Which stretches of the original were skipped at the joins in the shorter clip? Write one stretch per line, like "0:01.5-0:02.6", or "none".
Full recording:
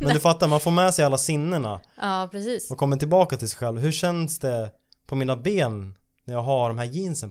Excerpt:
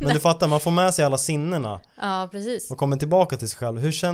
none